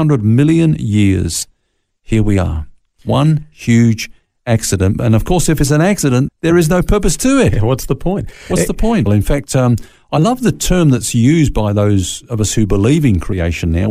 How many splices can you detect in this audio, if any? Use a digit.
2